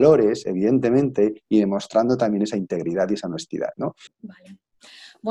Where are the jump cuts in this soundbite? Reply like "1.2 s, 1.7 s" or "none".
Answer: 4.1 s